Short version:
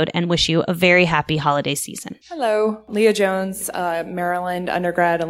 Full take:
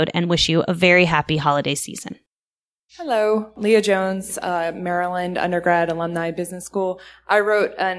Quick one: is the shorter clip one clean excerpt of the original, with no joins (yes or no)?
no